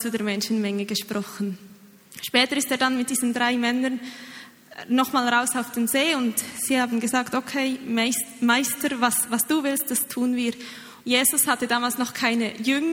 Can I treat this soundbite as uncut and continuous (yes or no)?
no